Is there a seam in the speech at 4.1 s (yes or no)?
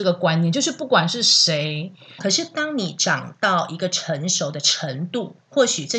no